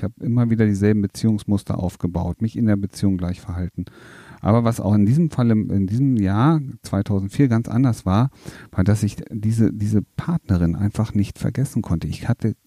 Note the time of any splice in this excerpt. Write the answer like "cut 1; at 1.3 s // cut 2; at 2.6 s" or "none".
none